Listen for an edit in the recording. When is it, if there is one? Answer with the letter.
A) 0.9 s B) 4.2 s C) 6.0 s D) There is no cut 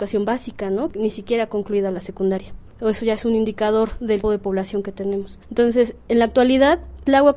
B